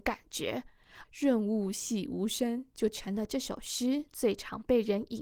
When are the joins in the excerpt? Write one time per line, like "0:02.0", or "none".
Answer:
0:01.0